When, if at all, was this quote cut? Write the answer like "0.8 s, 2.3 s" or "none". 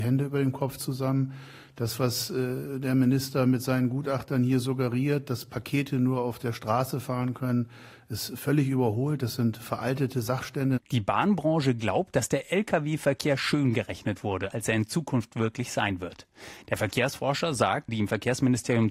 14.5 s, 16.6 s, 17.9 s